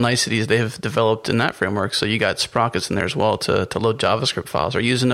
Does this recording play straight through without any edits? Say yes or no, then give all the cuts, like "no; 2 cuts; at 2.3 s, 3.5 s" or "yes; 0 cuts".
yes; 0 cuts